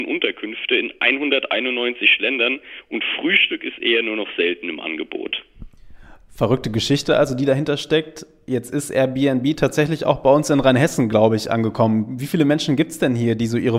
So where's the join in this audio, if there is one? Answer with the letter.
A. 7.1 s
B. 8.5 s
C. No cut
C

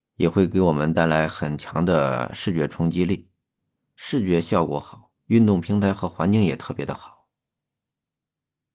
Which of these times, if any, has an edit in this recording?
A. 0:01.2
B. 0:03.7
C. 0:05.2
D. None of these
C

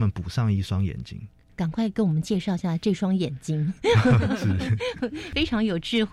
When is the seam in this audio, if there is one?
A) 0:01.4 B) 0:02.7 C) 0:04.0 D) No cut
A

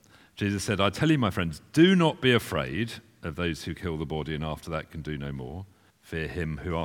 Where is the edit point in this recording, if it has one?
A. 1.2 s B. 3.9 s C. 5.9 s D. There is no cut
C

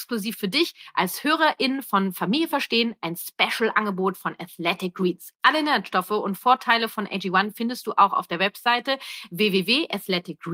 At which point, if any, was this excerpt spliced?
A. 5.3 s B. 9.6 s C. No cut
A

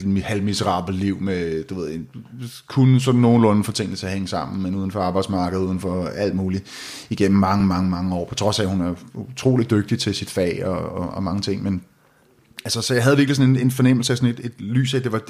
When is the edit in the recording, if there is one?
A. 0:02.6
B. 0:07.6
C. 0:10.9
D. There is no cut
D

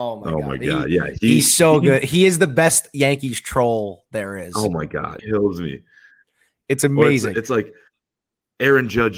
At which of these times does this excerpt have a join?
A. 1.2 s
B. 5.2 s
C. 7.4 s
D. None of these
B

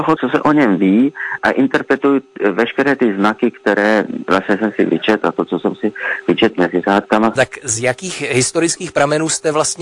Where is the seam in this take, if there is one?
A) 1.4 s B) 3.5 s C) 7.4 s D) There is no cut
C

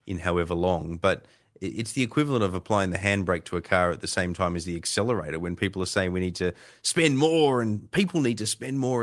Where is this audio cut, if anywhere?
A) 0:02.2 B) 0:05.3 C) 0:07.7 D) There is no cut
D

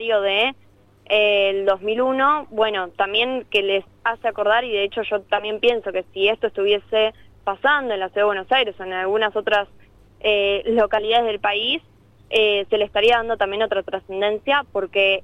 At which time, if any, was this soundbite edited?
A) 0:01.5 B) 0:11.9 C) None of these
C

